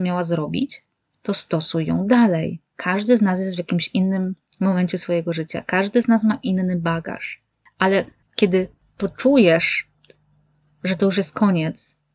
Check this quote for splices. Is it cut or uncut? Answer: uncut